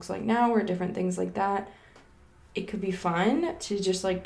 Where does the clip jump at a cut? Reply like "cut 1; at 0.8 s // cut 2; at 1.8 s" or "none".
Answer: none